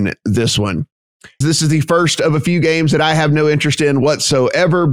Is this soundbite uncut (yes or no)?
no